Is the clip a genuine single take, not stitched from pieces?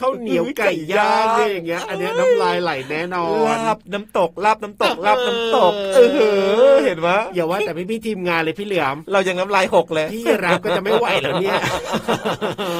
yes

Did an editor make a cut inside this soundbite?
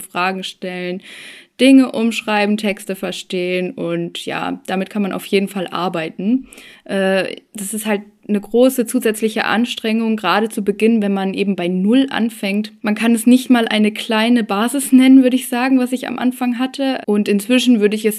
yes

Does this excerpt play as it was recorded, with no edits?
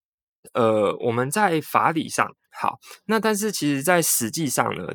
no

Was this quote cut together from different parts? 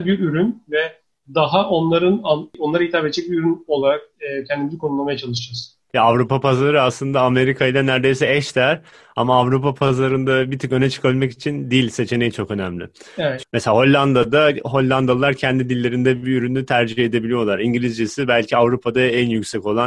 no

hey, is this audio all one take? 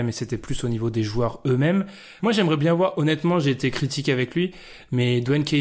no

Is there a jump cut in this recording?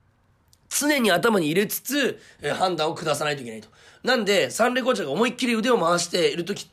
no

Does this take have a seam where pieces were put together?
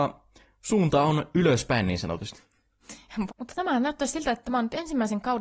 yes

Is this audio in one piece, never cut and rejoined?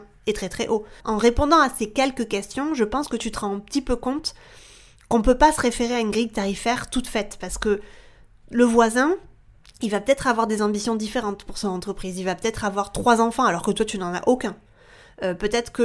no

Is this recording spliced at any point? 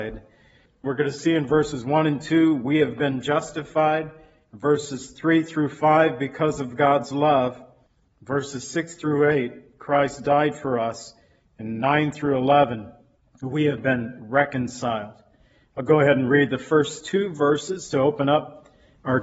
no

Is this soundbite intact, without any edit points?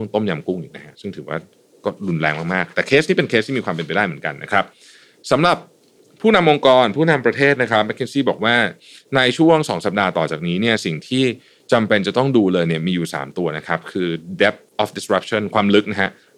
no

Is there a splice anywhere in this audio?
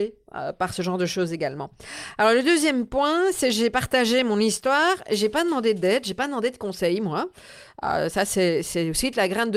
no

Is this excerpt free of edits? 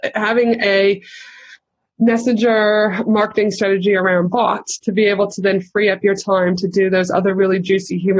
yes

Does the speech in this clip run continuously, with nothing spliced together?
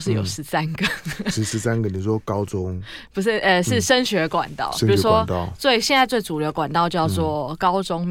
yes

